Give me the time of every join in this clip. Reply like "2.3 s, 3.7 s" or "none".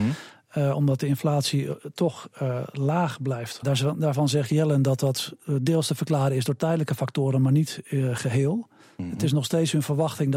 3.6 s